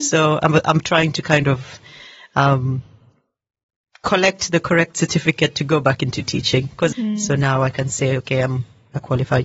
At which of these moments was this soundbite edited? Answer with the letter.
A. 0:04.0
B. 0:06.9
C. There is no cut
B